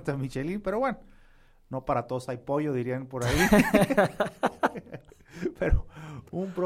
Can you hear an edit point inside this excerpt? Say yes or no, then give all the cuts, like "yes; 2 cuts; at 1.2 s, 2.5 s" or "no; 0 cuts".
no; 0 cuts